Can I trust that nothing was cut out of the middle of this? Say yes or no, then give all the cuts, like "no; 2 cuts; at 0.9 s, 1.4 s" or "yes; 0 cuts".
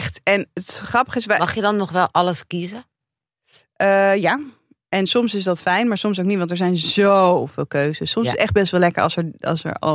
yes; 0 cuts